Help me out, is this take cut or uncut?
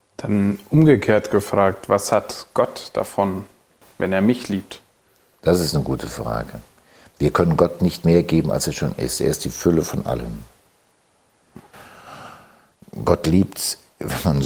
uncut